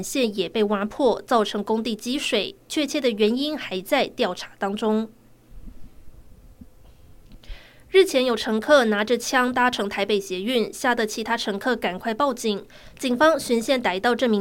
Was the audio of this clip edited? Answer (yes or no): no